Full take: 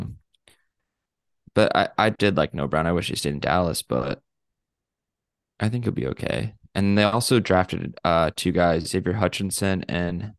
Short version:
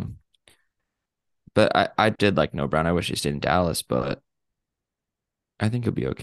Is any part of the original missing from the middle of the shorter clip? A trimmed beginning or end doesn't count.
no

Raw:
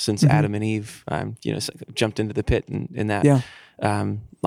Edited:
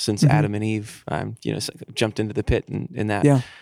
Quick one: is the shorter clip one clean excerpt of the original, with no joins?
yes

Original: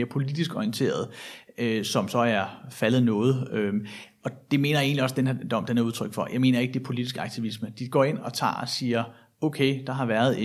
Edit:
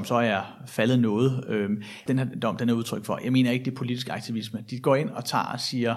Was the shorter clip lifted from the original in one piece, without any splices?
no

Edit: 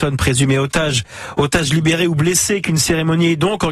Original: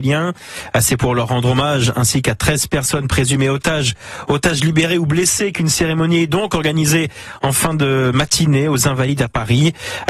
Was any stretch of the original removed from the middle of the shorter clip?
no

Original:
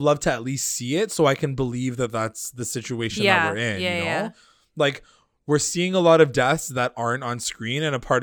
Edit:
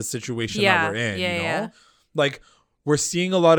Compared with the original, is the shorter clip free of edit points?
yes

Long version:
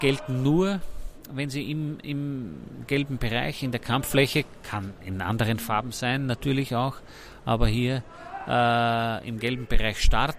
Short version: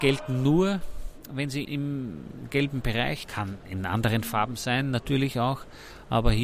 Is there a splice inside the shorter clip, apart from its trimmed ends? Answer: yes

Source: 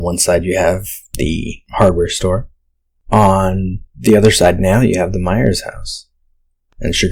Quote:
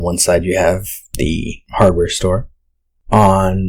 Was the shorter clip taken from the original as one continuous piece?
yes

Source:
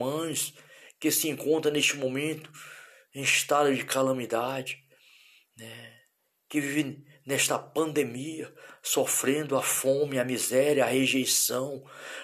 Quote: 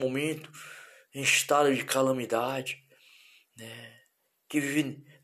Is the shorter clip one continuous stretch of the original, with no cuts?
yes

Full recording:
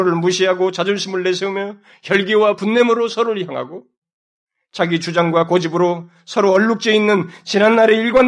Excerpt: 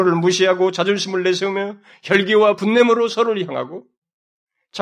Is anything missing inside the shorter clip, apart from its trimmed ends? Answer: no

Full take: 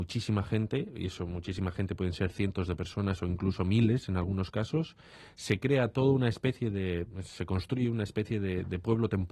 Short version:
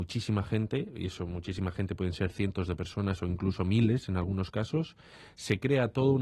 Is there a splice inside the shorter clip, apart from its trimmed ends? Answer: no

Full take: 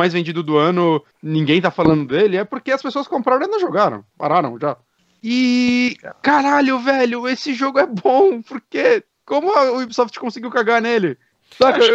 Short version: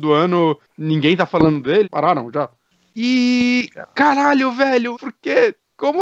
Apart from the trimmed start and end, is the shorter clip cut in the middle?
yes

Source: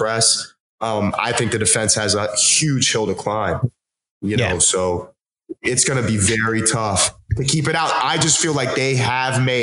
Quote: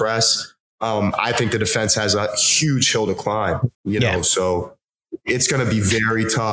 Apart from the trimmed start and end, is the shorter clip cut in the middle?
yes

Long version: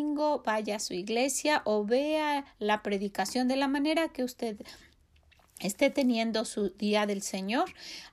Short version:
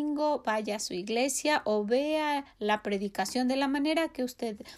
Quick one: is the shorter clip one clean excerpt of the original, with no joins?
yes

